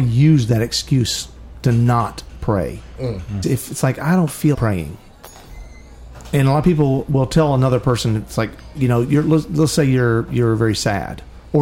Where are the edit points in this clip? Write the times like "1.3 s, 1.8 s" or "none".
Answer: 3.4 s, 4.5 s